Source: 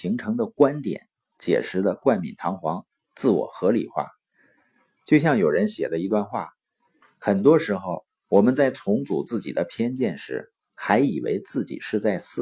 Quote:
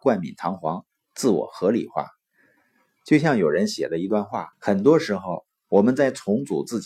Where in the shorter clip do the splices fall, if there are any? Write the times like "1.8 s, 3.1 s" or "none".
4.5 s